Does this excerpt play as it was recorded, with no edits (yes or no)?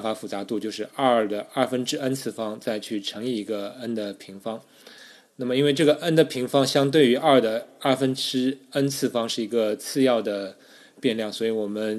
yes